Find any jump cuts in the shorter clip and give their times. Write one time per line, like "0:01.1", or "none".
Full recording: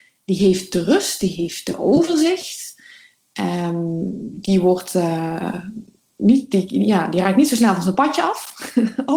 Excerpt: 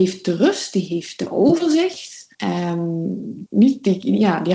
0:02.3
0:03.5

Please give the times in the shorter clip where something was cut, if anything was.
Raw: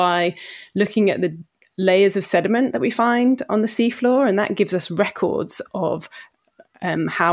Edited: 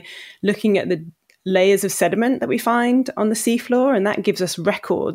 none

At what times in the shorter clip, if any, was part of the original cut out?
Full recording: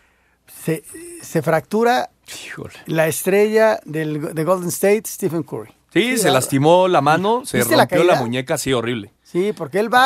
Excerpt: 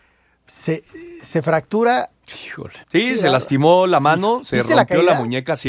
0:02.8

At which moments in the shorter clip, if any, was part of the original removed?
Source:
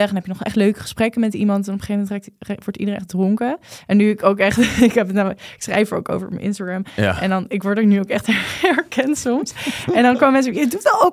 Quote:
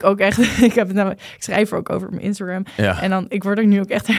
none

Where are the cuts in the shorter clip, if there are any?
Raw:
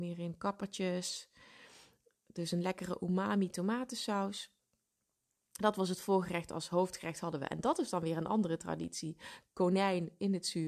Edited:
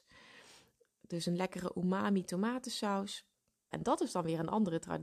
0:03.7

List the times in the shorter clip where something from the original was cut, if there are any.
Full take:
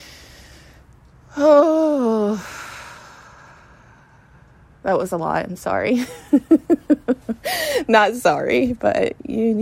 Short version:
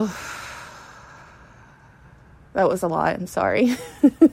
none

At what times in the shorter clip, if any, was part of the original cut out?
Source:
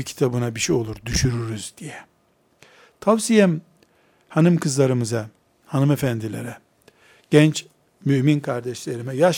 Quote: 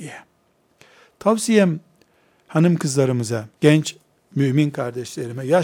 0:03.6

